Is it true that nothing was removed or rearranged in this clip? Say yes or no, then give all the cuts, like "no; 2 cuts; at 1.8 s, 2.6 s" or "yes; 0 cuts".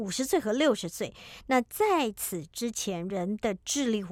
yes; 0 cuts